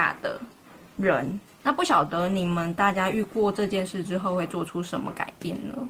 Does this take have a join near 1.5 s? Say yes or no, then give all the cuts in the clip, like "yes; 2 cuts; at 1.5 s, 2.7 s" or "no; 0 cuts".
yes; 1 cut; at 1.5 s